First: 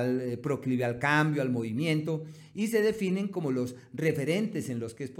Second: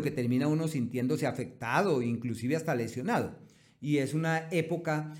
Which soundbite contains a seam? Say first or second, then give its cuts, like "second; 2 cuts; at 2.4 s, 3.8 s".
second; 1 cut; at 3.7 s